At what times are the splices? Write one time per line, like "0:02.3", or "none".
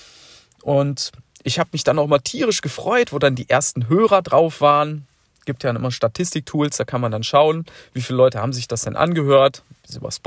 none